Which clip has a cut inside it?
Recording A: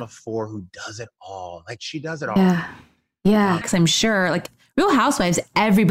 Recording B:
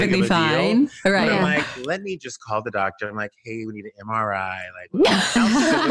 A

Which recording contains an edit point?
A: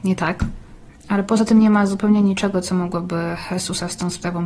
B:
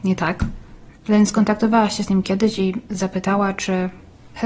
B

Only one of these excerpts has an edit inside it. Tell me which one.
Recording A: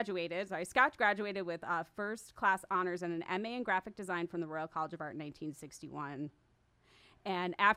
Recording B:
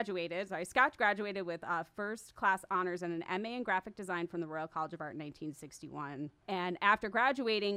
B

